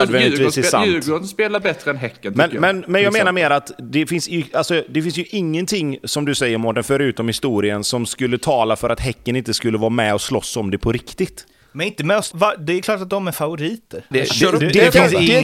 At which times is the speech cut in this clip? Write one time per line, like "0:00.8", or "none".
0:12.3
0:14.1